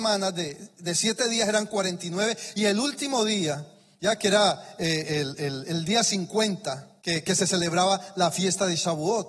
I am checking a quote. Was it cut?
yes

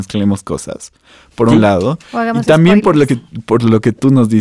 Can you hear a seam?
no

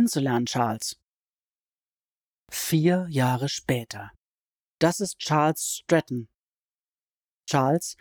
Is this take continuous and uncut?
no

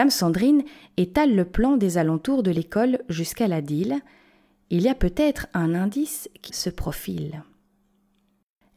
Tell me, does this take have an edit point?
yes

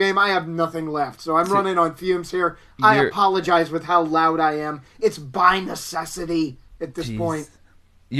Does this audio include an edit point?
no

